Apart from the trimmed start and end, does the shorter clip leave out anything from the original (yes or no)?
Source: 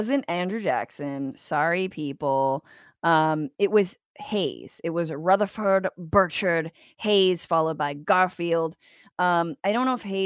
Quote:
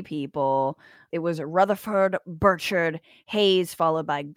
yes